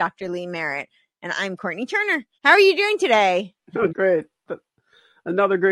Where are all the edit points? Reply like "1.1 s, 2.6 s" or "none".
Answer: 2.3 s, 3.9 s